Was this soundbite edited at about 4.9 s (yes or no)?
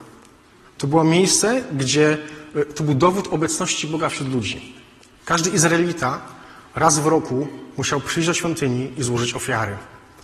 no